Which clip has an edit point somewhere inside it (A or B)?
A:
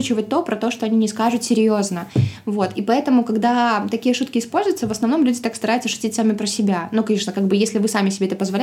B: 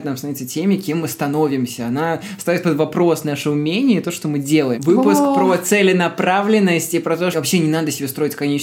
B